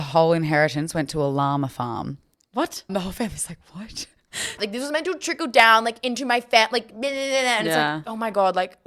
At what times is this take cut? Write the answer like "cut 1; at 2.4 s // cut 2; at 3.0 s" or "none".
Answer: cut 1; at 2.9 s // cut 2; at 4.6 s